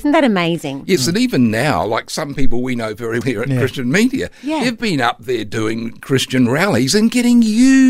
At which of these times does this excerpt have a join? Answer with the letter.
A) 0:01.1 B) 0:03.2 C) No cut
B